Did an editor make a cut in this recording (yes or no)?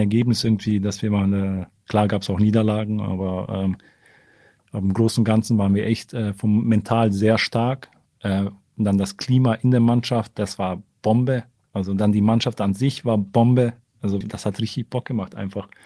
yes